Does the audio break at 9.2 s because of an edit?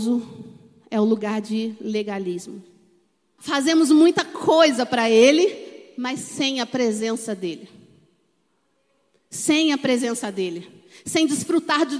no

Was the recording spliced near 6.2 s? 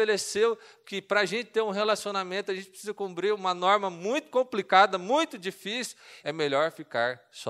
yes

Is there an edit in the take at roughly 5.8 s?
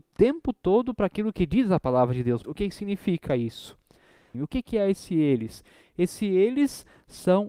no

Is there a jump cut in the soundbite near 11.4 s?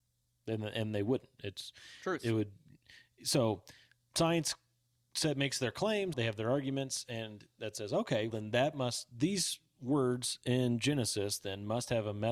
no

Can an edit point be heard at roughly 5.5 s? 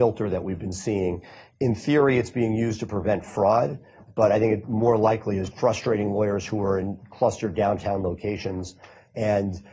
yes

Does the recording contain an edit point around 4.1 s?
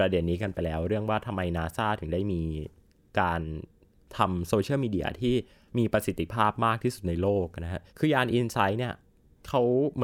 no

